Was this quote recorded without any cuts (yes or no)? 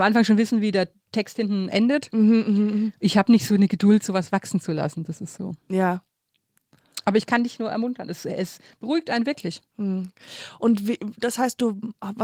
yes